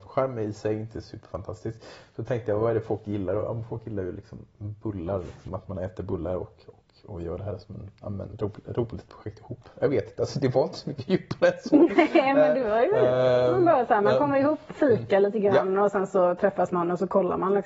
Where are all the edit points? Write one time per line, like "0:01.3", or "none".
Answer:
0:05.5

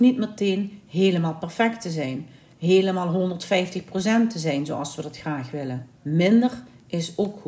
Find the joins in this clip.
0:06.0

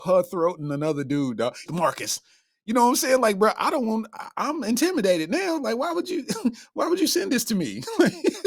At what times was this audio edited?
0:01.7

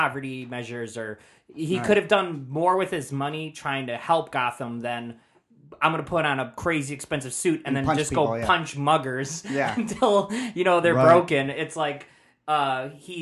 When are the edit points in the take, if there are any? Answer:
none

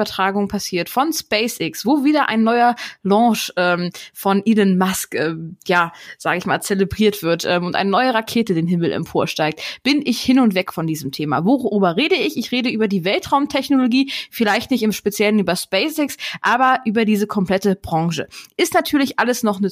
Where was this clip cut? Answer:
none

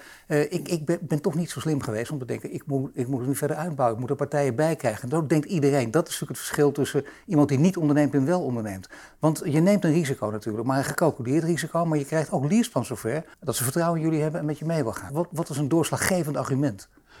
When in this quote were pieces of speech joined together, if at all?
0:13.3
0:15.1

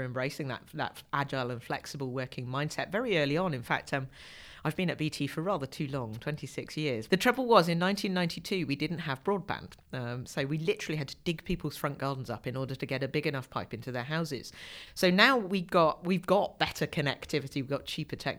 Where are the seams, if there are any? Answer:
0:07.1

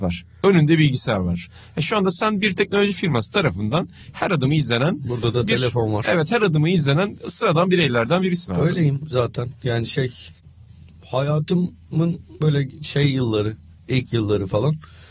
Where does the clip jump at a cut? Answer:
none

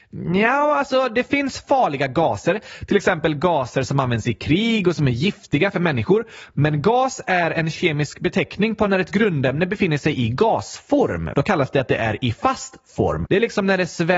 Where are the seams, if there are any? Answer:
0:11.3
0:13.2

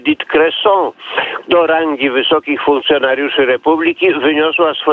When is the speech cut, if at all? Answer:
0:01.4

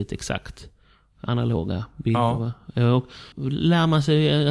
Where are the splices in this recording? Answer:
0:03.3

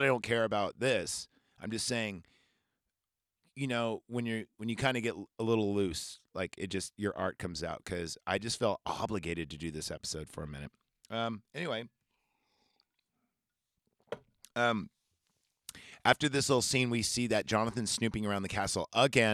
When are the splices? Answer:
none

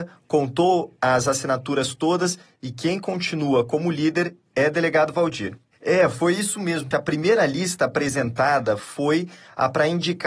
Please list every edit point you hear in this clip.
0:05.7
0:06.9

